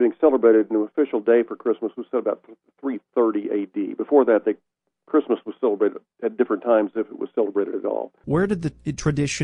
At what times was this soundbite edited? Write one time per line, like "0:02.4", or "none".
0:08.2